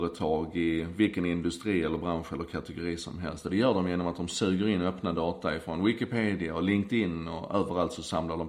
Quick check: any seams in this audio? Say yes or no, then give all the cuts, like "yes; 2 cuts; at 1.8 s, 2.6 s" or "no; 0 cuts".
no; 0 cuts